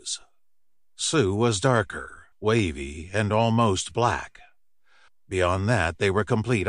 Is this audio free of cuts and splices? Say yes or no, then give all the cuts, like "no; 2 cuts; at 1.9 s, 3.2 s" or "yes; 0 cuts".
no; 2 cuts; at 2.3 s, 5.1 s